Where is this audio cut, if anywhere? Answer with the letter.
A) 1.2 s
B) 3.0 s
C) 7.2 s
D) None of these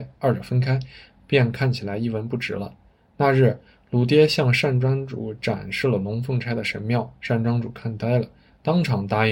D